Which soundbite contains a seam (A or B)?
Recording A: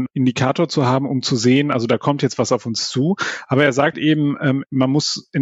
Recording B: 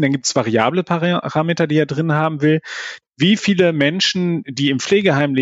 A